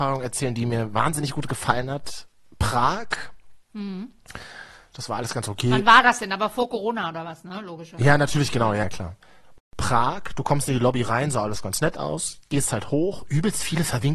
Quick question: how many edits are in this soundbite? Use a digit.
0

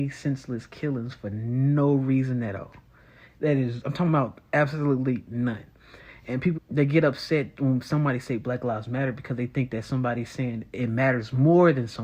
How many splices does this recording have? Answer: 1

